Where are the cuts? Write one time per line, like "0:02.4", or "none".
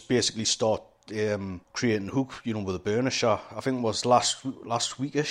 0:01.6
0:03.5